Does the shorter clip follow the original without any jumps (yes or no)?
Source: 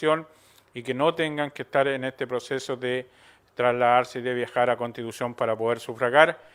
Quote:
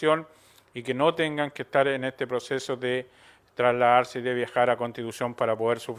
yes